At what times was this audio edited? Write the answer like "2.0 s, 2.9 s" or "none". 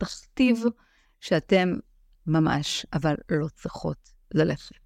2.1 s

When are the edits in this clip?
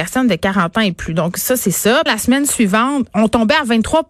2.1 s, 3.1 s

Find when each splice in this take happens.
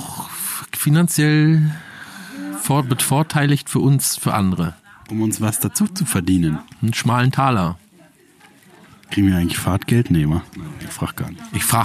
none

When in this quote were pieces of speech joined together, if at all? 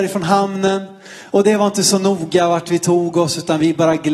none

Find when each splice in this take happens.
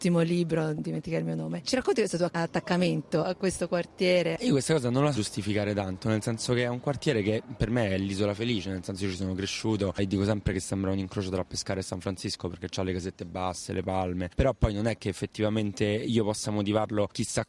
5.1 s

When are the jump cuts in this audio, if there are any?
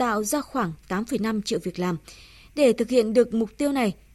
none

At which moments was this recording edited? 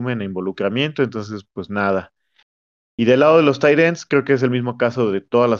none

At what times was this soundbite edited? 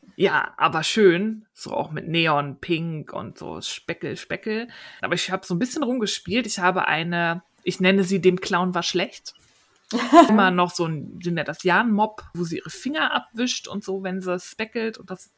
5.0 s, 10.3 s, 12.3 s

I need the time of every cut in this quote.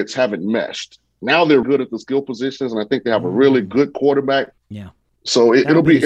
1.6 s, 4.6 s

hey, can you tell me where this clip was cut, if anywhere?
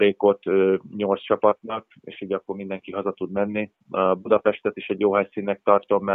none

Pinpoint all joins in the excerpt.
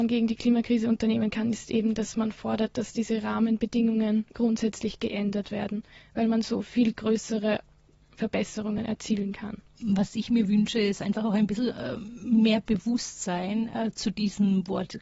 none

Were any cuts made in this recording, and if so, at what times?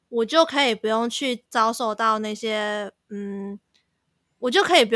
1.5 s

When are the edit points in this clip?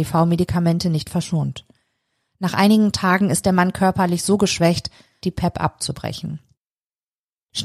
5.2 s

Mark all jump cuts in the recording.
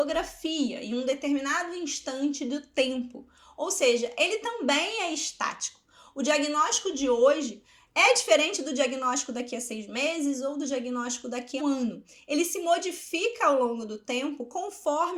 11.6 s

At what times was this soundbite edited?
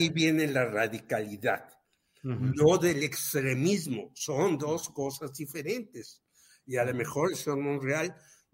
none

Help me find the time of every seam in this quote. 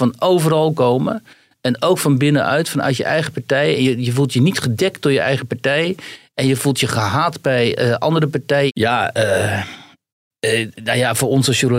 8.7 s

